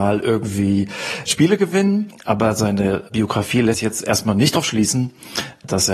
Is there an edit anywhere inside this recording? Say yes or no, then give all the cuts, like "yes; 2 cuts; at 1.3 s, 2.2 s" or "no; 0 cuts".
no; 0 cuts